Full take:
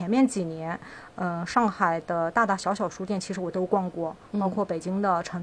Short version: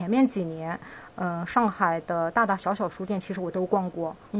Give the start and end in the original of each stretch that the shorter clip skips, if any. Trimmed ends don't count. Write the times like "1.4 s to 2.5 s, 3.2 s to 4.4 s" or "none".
none